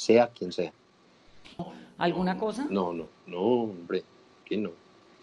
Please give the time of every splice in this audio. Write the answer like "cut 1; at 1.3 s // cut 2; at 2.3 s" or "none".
cut 1; at 1.6 s